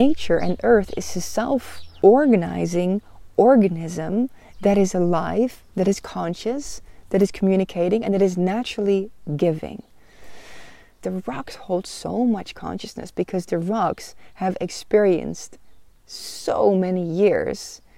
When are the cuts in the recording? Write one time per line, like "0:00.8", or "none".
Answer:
0:11.0